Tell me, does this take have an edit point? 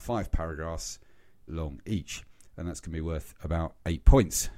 yes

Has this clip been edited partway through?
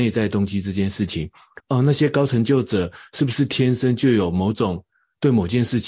yes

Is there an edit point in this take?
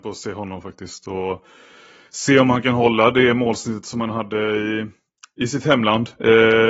no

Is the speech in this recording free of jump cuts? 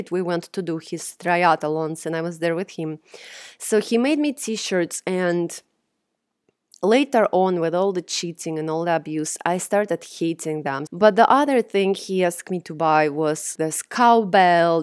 no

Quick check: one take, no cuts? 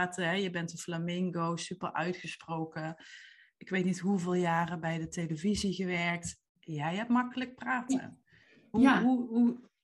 yes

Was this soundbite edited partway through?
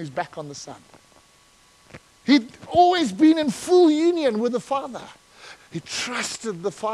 yes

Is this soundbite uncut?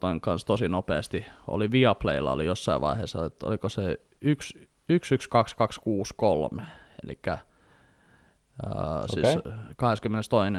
yes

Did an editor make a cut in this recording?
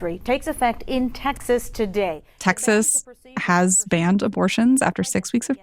no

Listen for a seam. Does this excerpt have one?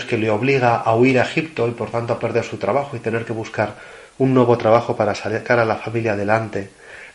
no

